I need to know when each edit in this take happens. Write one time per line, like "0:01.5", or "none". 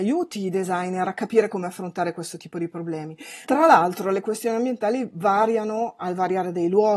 0:03.4